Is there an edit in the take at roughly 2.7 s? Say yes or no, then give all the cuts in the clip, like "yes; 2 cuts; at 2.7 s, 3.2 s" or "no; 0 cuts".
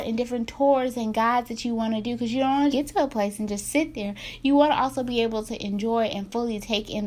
yes; 1 cut; at 2.7 s